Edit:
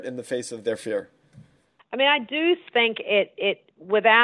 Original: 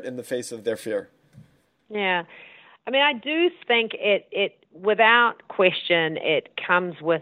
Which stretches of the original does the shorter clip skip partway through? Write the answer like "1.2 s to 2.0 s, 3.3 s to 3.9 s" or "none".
1.8 s to 2.7 s